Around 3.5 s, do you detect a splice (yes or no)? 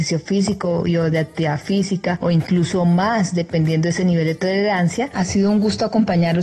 no